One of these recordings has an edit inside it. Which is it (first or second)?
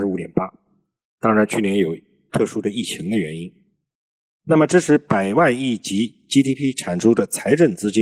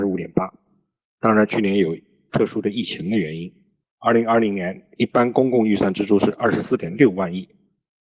second